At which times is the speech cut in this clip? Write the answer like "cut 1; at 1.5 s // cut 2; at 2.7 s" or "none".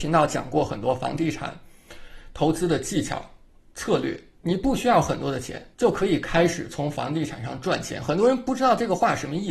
cut 1; at 4.3 s // cut 2; at 5.7 s

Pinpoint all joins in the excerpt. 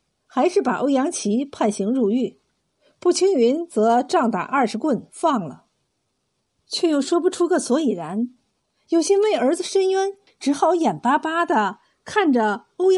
cut 1; at 6.6 s // cut 2; at 10.3 s

